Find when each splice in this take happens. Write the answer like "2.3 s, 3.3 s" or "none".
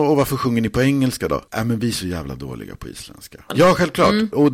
3.5 s